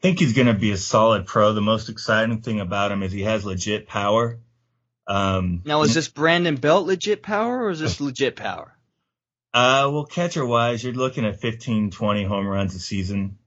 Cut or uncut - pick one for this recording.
uncut